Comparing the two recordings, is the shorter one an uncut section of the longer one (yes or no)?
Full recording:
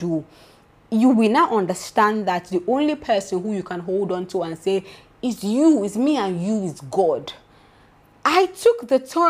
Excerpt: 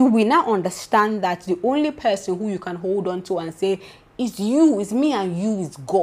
yes